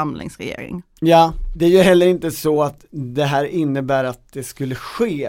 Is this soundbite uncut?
yes; 0 cuts

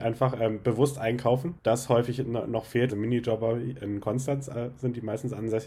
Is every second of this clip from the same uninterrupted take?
no; 2 cuts; at 1.6 s, 2.9 s

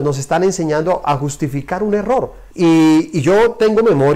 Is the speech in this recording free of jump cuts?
no; 1 cut; at 2.5 s

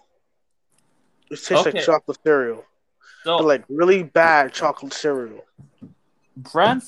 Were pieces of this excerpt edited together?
no; 0 cuts

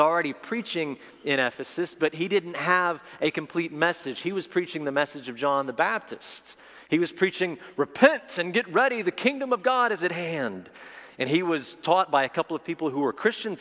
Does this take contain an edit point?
no; 0 cuts

